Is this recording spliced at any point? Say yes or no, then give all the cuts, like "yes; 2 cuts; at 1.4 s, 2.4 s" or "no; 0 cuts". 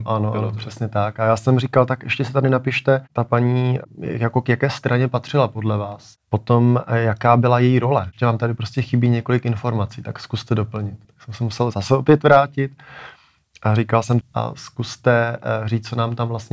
yes; 2 cuts; at 11.0 s, 14.2 s